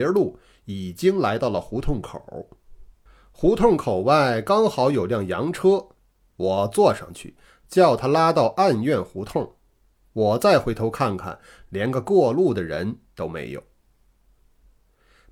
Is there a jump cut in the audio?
no; 0 cuts

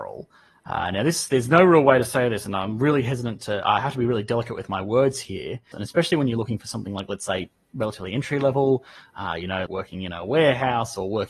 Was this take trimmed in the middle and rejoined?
yes; 2 cuts; at 5.7 s, 9.7 s

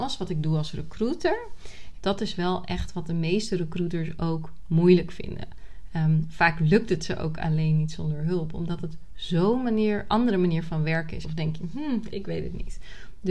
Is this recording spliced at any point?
yes; 2 cuts; at 2.0 s, 11.2 s

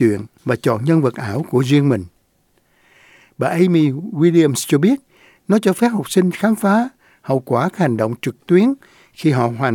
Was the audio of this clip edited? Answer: no; 0 cuts

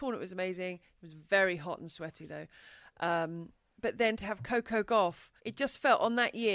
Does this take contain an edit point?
yes; 1 cut; at 5.4 s

